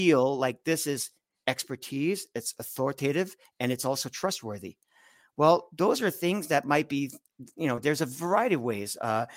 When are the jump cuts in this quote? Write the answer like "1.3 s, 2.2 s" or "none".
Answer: none